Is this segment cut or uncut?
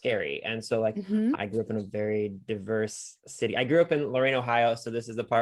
cut